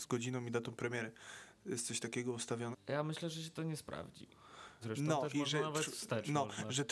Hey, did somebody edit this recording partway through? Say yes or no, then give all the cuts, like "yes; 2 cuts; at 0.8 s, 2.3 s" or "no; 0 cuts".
yes; 2 cuts; at 2.7 s, 4.8 s